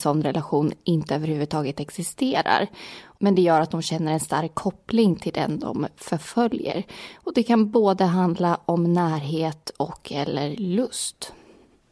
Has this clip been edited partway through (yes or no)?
no